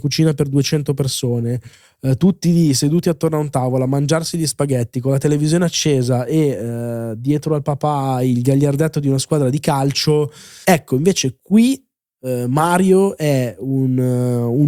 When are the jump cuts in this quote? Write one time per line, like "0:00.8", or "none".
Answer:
0:10.6